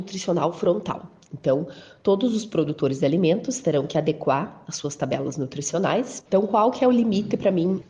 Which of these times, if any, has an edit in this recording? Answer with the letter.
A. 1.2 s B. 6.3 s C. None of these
B